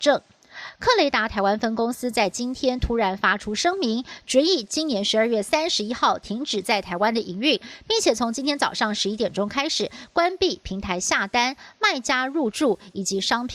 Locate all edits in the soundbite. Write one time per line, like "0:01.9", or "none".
none